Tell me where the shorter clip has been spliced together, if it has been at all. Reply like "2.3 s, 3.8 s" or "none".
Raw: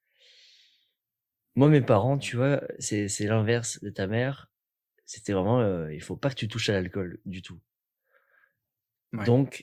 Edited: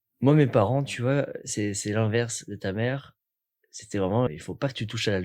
4.3 s